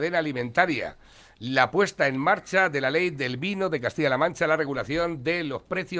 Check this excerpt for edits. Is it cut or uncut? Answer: uncut